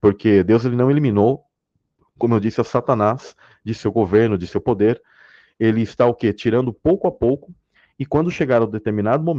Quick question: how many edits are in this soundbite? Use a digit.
0